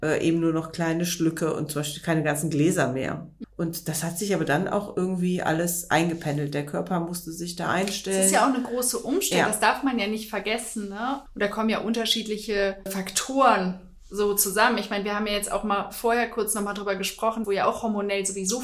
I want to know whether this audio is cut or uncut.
cut